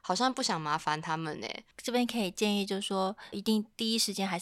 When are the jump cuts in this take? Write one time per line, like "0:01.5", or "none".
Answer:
0:03.3